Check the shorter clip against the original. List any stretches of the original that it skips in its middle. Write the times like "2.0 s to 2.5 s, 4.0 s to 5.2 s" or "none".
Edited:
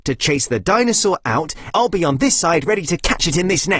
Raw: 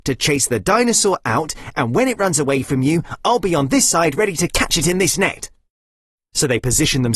1.7 s to 3.2 s